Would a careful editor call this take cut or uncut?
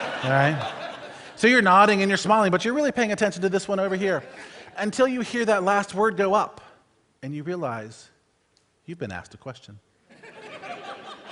uncut